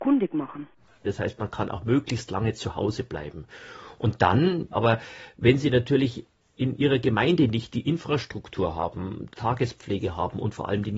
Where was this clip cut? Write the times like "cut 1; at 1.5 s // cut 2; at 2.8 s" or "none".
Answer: cut 1; at 1.0 s // cut 2; at 4.7 s // cut 3; at 9.4 s